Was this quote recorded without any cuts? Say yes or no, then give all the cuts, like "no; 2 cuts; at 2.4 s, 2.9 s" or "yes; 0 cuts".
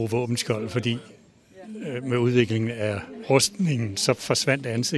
no; 1 cut; at 3.2 s